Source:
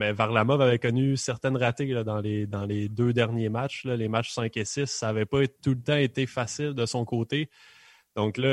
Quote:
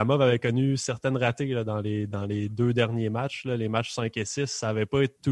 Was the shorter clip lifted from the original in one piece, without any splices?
yes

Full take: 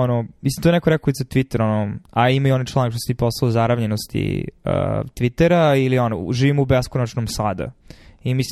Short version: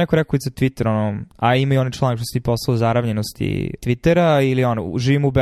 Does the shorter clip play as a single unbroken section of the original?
no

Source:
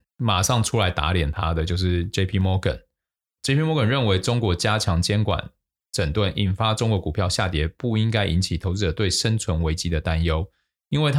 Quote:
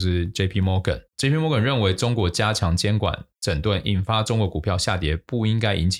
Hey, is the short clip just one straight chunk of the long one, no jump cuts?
no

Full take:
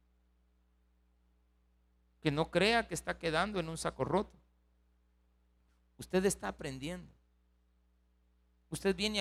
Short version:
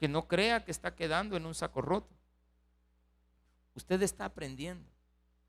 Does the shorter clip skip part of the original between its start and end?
no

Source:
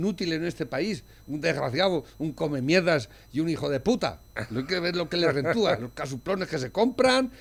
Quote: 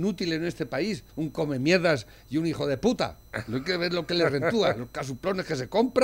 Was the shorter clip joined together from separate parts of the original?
yes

